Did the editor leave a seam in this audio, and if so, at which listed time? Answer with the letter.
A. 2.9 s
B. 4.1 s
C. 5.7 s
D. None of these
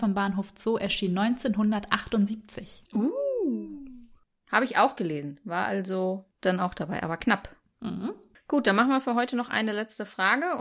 A